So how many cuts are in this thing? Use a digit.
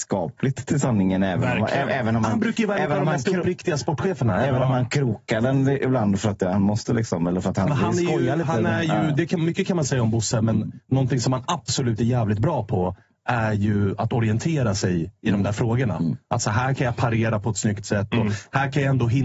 0